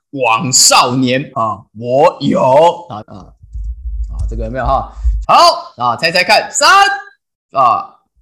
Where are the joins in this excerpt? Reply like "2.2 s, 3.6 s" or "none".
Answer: 1.3 s, 3.0 s, 5.2 s